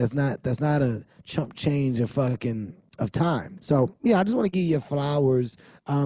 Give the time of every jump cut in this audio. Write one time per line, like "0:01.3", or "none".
0:03.6